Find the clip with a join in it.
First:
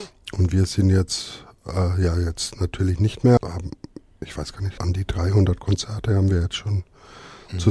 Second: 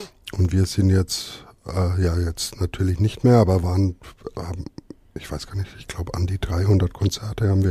first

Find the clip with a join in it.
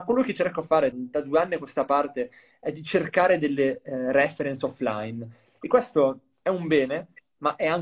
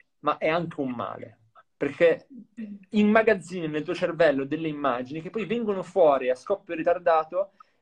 first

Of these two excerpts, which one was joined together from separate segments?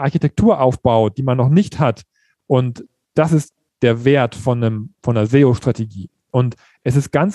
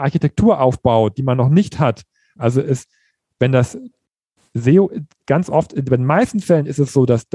second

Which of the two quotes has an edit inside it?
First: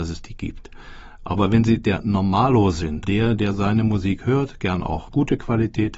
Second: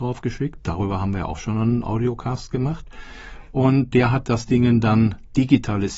first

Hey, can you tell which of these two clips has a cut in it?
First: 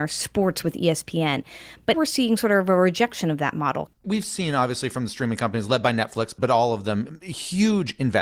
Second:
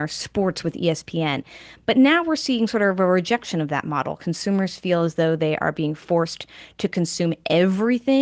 first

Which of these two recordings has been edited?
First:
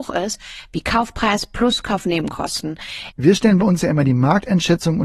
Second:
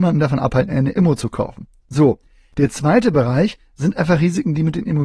first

